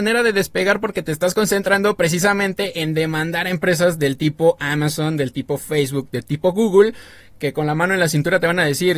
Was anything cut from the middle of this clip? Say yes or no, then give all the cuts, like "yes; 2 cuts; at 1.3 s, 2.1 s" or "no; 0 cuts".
no; 0 cuts